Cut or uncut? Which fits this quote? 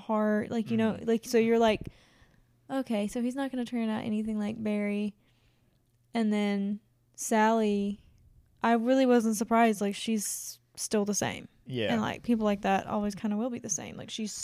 uncut